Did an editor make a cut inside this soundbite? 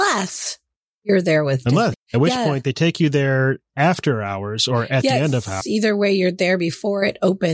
yes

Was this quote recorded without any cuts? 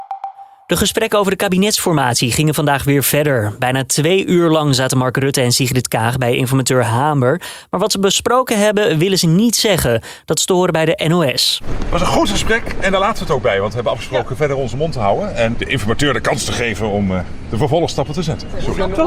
no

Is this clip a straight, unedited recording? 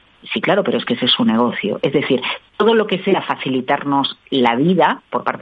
yes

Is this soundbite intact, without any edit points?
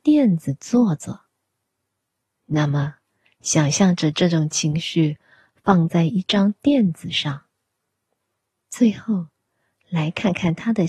yes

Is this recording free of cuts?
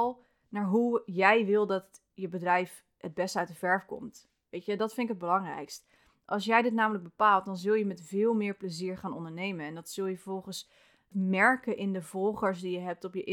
no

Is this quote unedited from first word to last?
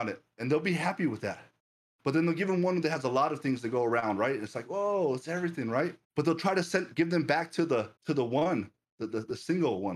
no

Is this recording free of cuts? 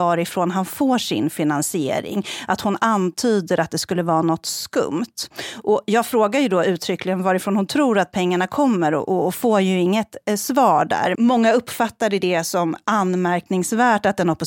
no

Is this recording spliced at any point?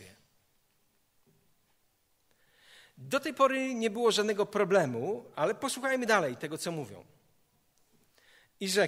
no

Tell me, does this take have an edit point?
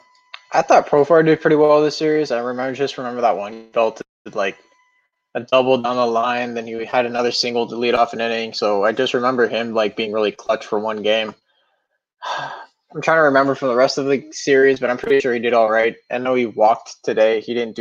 no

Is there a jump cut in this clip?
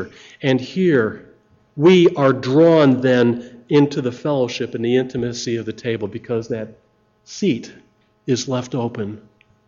yes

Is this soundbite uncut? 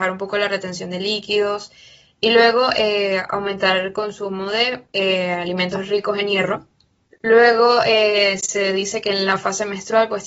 no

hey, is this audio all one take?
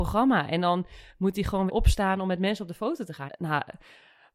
no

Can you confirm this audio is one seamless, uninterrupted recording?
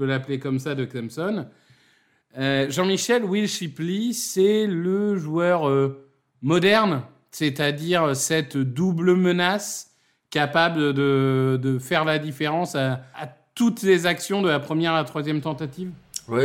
no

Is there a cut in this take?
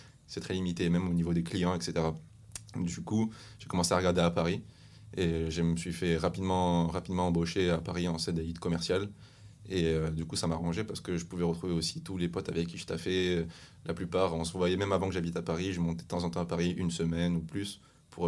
no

